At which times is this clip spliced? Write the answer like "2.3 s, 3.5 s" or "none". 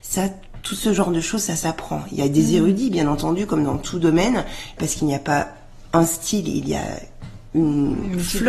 4.8 s

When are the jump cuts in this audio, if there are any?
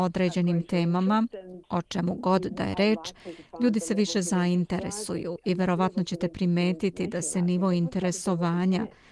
none

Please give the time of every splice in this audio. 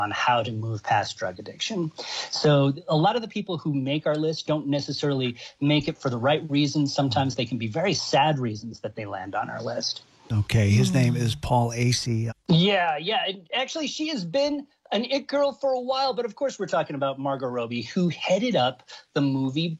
12.3 s

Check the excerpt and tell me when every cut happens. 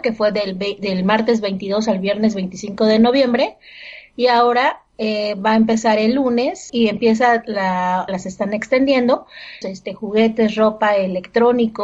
6.7 s, 8.1 s, 9.6 s

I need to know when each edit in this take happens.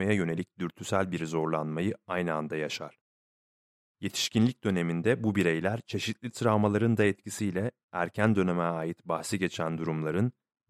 none

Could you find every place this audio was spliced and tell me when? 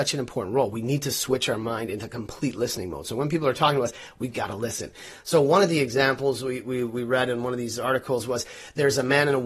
none

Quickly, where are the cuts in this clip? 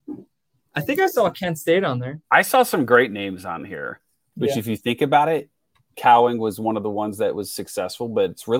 2.2 s, 4.3 s, 5.9 s

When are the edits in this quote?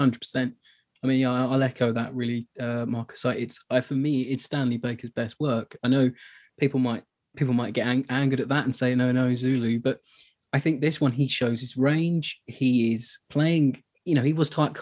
none

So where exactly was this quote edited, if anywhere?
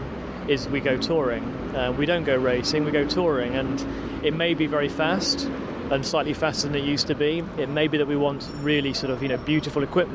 none

